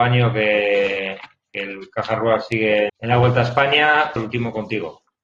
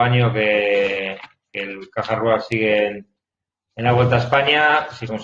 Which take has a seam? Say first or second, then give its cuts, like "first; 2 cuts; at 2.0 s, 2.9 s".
first; 2 cuts; at 2.9 s, 4.2 s